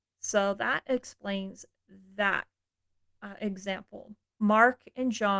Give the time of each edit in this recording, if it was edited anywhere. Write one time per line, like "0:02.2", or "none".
0:04.4